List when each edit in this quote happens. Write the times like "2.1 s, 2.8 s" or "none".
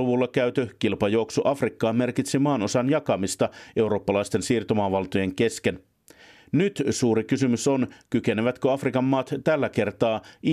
none